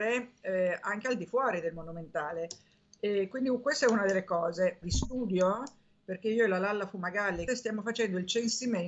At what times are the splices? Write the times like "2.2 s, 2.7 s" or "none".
4.8 s, 7.5 s